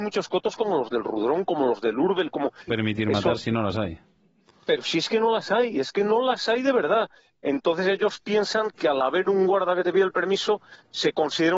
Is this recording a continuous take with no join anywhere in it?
no; 1 cut; at 2.7 s

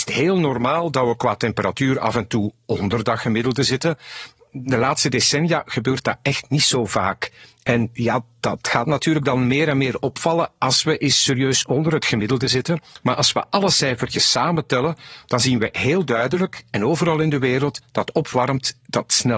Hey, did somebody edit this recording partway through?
no; 0 cuts

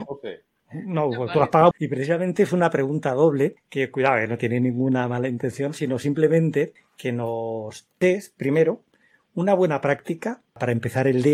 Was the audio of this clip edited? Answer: yes; 1 cut; at 1.7 s

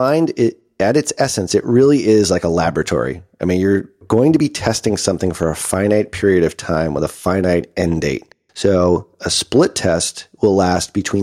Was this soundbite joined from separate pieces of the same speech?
no; 0 cuts

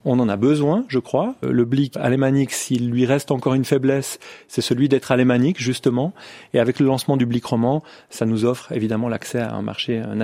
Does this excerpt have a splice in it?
yes; 1 cut; at 1.9 s

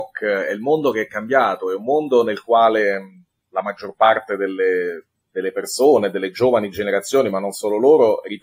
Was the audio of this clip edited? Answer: no; 0 cuts

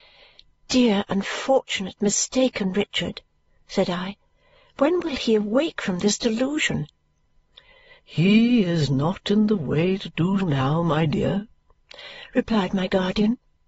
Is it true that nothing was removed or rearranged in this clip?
no; 1 cut; at 10.4 s

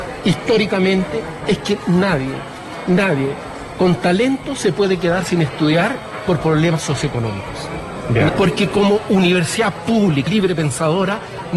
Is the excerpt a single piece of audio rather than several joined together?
no; 2 cuts; at 8.3 s, 10.3 s

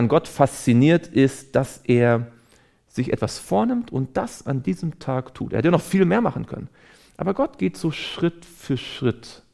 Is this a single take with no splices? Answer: yes; 0 cuts

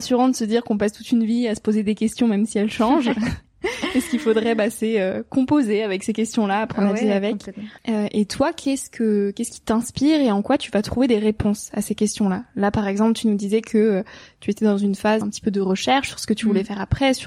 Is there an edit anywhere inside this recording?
yes; 2 cuts; at 7.8 s, 15.2 s

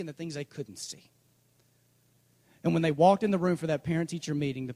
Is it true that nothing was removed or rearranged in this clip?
yes; 0 cuts

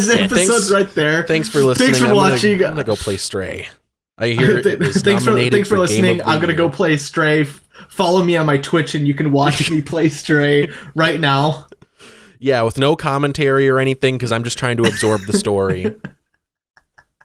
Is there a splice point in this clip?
no; 0 cuts

